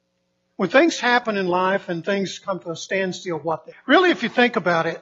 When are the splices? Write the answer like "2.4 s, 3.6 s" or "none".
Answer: 3.7 s